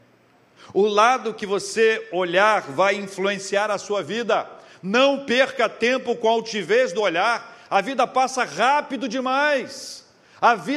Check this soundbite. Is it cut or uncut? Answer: uncut